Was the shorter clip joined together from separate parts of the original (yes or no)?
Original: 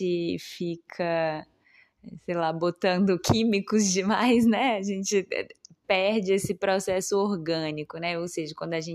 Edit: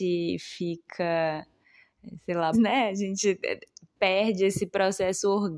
yes